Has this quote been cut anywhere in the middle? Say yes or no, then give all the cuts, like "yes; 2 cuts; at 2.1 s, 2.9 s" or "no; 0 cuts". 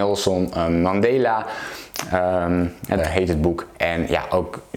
yes; 1 cut; at 3.0 s